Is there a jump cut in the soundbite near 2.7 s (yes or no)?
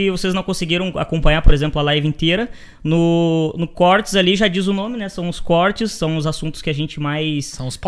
no